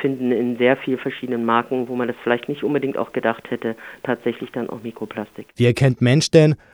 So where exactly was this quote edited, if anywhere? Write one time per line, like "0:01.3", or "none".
0:05.5

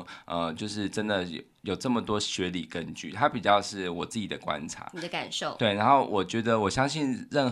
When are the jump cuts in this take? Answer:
none

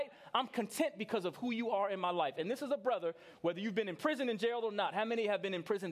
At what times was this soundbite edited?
none

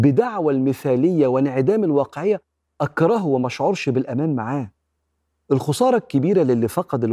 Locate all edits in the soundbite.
none

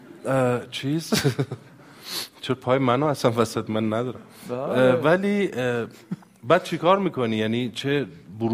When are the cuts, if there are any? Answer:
none

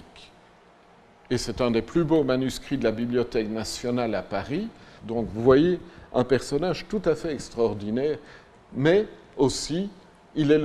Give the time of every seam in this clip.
0:05.0

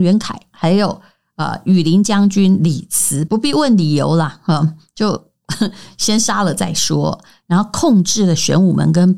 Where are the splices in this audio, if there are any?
0:03.3

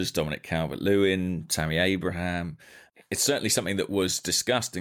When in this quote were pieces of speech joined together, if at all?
none

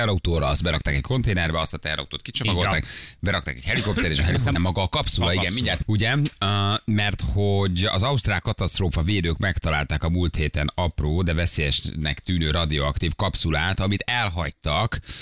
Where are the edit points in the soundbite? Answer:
0:04.6
0:05.8

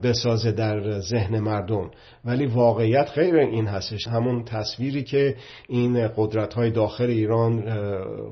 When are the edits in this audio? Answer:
0:04.1

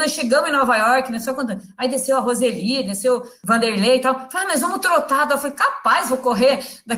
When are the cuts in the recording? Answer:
none

